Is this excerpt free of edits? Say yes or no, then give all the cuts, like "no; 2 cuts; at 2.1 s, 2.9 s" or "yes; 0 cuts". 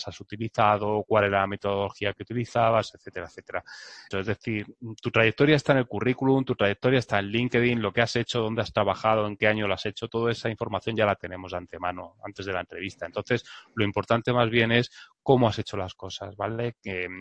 no; 1 cut; at 4.1 s